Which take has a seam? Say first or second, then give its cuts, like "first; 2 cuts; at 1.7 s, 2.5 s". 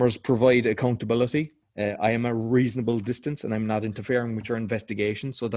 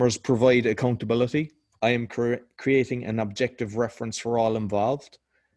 first; 1 cut; at 1.6 s